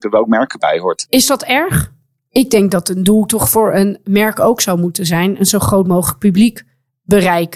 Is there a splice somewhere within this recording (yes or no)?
no